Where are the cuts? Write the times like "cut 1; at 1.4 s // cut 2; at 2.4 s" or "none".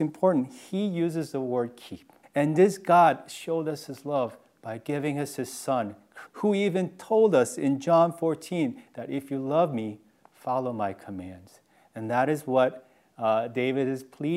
cut 1; at 2.2 s // cut 2; at 6.3 s